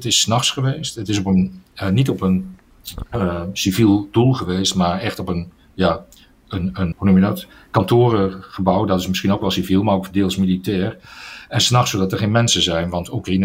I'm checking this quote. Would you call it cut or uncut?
cut